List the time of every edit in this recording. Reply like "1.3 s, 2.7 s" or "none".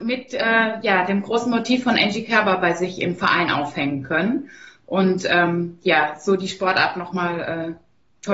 none